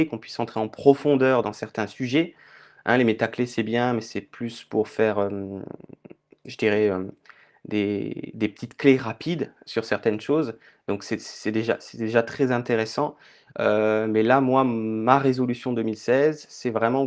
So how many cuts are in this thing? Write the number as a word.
zero